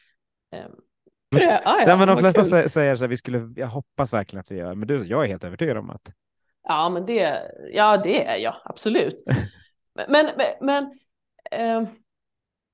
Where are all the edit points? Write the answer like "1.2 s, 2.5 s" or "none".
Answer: 1.3 s